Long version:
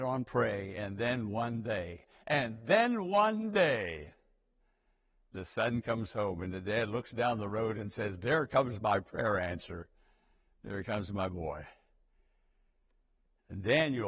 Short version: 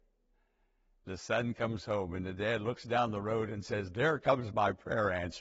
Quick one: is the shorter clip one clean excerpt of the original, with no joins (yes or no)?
yes